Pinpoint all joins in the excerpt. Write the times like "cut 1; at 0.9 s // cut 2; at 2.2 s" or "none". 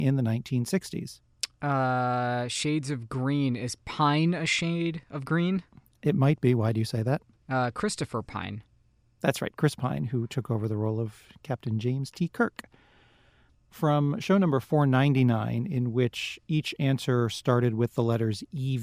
none